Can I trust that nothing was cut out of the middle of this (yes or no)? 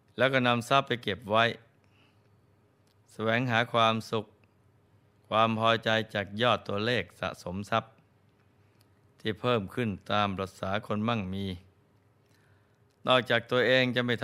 yes